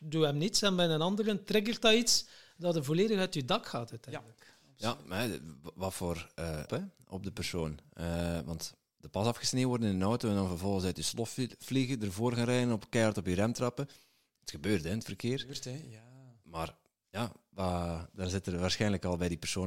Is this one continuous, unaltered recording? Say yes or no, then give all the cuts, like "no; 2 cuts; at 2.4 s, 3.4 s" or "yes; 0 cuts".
no; 1 cut; at 6.7 s